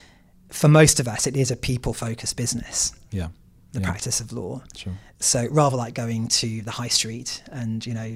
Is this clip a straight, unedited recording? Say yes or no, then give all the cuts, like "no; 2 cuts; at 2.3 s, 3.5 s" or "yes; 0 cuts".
yes; 0 cuts